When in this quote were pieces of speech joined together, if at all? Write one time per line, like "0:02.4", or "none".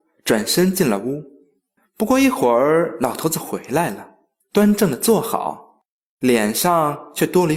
0:01.8